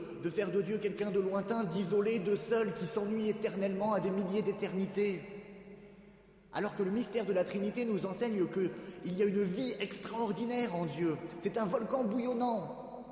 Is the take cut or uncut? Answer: uncut